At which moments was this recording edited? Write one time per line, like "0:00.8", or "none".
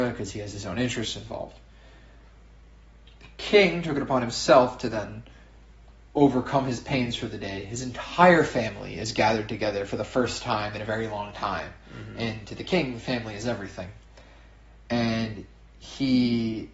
none